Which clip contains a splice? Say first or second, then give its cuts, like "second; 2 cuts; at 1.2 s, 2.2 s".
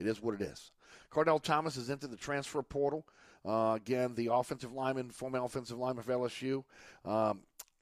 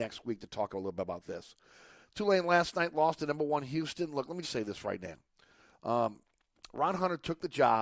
second; 1 cut; at 4.4 s